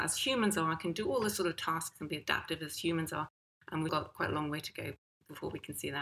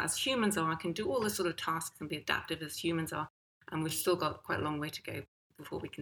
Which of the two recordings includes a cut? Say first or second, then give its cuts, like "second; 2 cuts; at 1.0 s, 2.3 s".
first; 1 cut; at 3.9 s